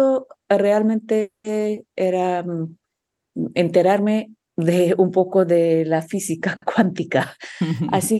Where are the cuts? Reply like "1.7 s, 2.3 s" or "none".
none